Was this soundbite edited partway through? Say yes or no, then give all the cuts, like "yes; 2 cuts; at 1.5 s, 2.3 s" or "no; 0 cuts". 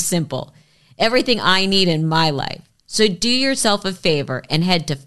no; 0 cuts